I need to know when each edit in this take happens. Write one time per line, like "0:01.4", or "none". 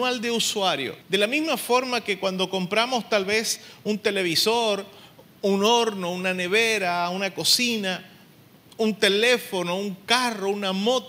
0:01.0